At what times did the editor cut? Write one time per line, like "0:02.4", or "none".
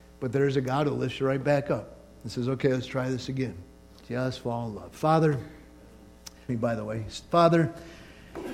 0:04.0
0:06.5